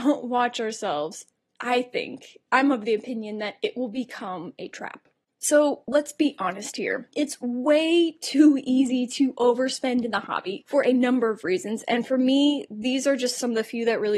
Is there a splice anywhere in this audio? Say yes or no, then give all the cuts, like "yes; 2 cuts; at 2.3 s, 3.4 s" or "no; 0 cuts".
no; 0 cuts